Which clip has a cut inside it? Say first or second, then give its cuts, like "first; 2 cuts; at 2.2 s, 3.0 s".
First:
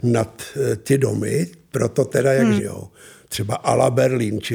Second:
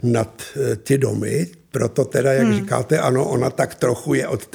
first; 1 cut; at 2.6 s